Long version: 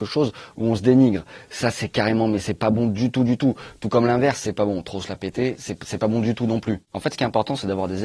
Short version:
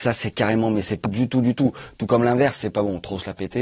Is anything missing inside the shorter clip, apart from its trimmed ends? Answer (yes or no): yes